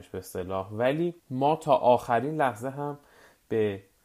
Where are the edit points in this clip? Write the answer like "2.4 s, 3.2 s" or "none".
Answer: 1.2 s